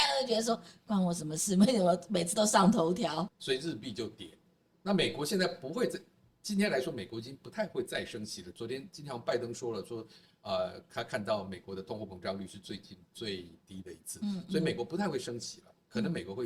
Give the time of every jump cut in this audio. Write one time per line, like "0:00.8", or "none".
0:03.3